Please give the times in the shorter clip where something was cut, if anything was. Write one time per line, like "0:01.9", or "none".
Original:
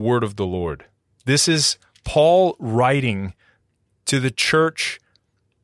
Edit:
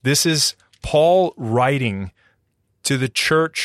none